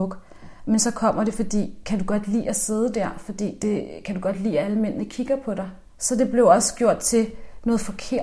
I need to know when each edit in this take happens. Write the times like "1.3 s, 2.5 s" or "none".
5.9 s

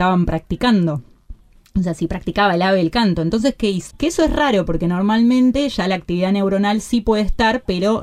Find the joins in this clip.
3.9 s

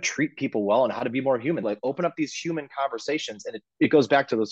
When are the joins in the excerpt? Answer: 1.6 s

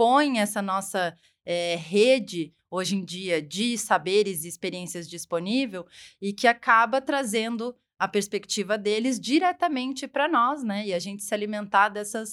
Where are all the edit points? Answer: none

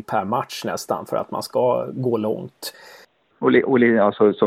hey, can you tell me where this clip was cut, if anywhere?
3.3 s

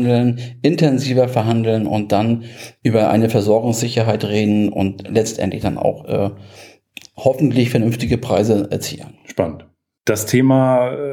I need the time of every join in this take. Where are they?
none

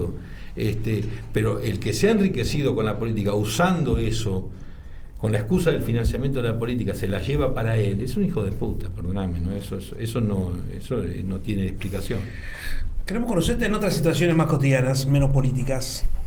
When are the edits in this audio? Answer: none

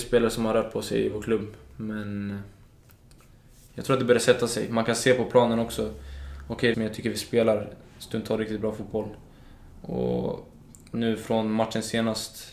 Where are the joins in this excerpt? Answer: 6.7 s

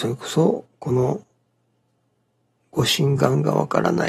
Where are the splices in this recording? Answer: none

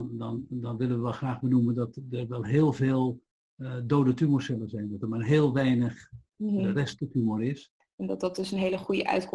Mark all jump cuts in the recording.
7.8 s

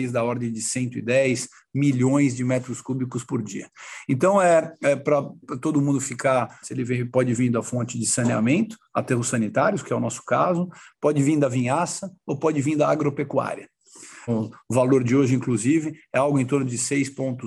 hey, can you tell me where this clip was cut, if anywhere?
6.6 s, 14.3 s

